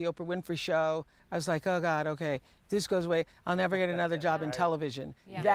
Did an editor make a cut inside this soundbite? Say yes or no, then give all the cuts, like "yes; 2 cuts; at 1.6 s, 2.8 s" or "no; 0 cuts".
no; 0 cuts